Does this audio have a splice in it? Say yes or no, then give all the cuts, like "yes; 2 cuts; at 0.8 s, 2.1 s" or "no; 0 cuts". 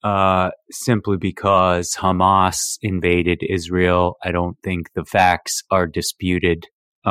no; 0 cuts